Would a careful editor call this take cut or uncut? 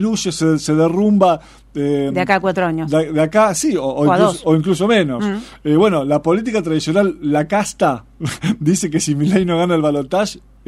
uncut